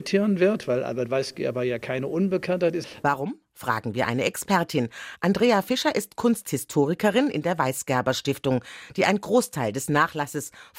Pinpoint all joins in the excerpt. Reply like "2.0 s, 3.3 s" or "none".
3.0 s